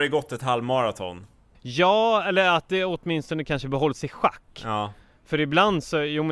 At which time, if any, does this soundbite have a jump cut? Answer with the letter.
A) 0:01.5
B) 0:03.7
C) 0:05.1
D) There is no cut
A